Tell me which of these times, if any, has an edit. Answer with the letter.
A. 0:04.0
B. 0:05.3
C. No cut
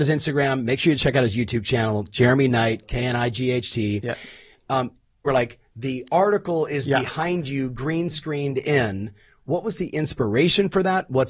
B